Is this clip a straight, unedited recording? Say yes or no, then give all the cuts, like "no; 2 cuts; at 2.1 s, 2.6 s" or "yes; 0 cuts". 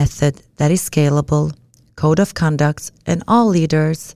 yes; 0 cuts